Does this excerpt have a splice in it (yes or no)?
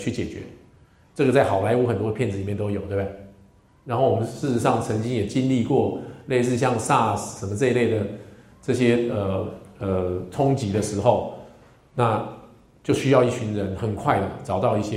no